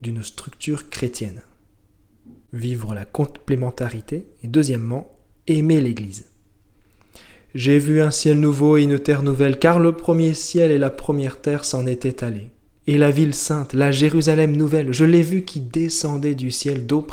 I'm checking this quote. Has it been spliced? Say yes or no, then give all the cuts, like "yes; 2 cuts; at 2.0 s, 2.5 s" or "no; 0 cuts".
no; 0 cuts